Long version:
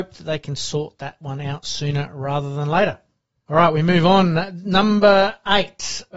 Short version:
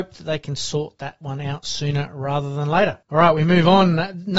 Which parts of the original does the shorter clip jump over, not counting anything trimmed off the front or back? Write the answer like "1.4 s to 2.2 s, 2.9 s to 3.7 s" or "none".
3.0 s to 3.4 s